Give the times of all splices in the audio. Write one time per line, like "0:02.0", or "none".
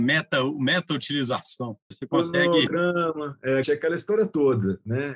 0:01.9
0:03.6